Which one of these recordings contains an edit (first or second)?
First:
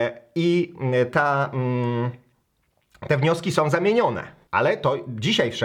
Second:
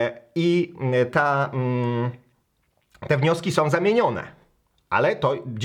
first